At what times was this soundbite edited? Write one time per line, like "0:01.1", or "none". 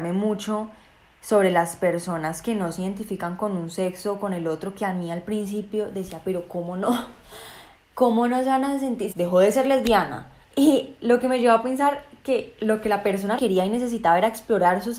0:09.1
0:13.4